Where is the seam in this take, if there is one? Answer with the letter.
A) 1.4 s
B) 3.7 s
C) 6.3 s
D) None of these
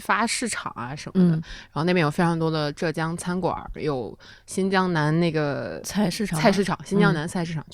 D